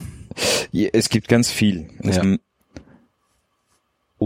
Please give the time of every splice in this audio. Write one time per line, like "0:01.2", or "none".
0:02.2